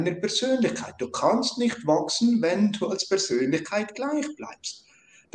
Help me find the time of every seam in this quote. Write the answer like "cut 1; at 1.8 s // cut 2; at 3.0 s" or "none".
none